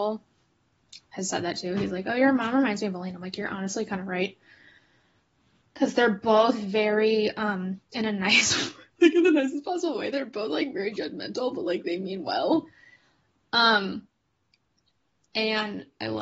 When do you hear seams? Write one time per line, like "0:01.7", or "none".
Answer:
none